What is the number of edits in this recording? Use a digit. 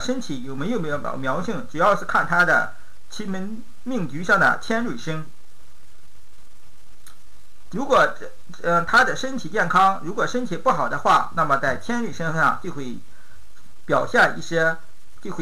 1